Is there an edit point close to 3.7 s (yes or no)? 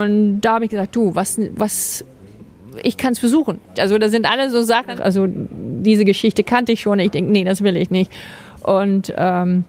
yes